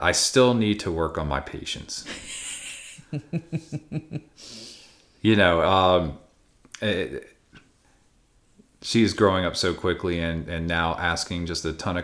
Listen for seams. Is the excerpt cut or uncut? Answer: uncut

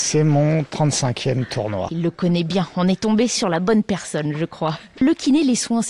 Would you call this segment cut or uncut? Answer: uncut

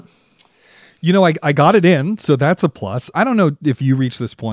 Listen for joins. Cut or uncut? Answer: cut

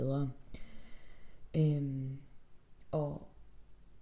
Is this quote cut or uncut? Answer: cut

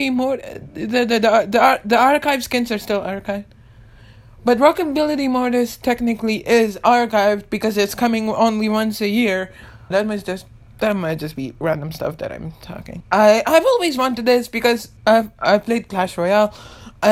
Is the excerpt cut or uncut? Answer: cut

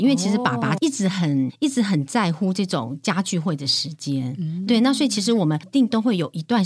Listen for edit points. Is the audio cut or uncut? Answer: cut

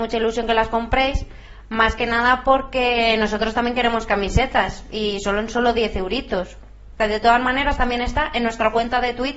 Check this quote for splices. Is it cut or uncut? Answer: cut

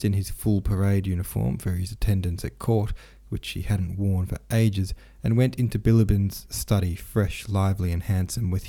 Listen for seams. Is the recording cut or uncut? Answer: uncut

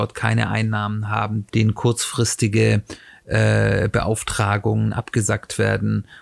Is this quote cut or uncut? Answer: cut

